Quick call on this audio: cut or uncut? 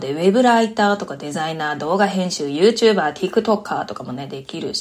uncut